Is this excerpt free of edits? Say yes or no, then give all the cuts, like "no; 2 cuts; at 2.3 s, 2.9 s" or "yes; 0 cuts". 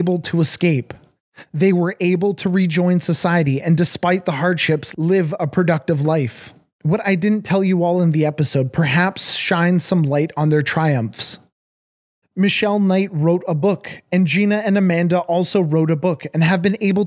no; 1 cut; at 12.2 s